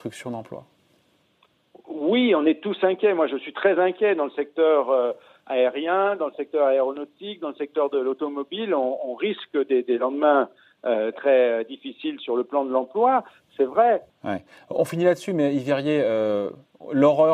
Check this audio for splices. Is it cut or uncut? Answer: cut